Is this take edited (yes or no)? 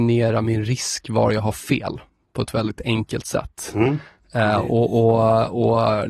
no